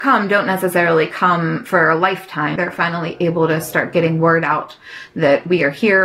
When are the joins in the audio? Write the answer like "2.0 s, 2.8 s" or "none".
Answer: 2.6 s